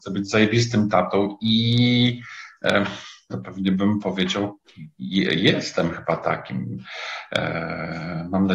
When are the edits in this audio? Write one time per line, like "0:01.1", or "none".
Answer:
0:03.3